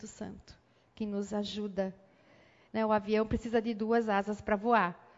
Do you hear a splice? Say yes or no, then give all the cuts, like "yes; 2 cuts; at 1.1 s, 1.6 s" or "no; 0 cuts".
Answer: yes; 1 cut; at 2.7 s